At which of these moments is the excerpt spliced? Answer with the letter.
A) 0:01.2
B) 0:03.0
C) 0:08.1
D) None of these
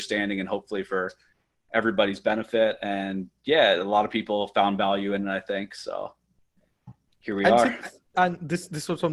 C